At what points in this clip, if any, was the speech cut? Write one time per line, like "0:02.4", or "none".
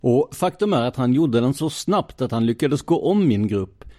none

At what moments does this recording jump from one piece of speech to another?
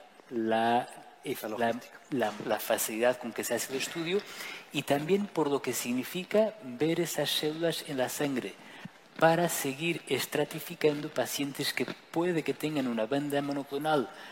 0:02.4

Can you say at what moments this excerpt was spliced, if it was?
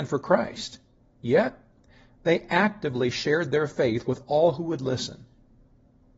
none

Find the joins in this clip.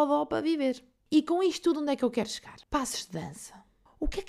0:02.6

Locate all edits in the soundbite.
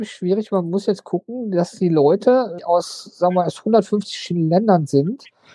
0:02.6

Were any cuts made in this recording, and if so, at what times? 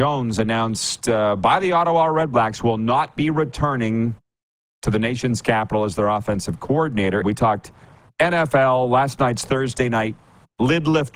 0:07.2

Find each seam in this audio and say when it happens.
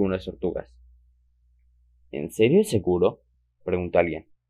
none

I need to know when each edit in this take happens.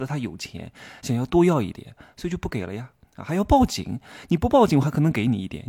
none

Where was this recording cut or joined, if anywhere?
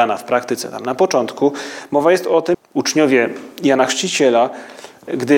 0:02.5

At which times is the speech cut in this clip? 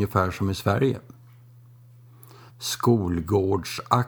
0:02.5

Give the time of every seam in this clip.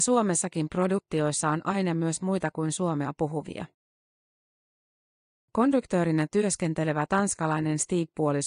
0:05.3

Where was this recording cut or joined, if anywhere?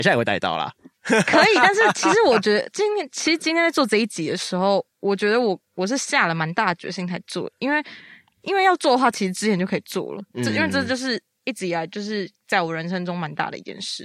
none

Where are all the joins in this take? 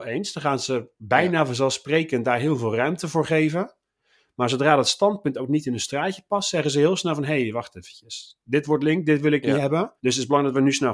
0:10.0

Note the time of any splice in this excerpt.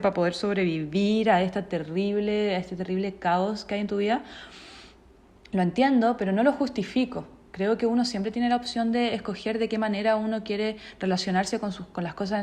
none

